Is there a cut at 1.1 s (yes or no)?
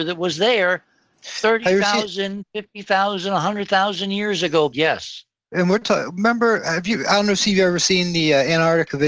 yes